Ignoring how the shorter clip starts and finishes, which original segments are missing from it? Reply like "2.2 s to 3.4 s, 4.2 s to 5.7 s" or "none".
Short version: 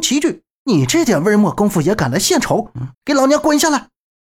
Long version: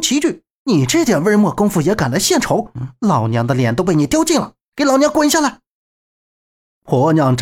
2.9 s to 4.7 s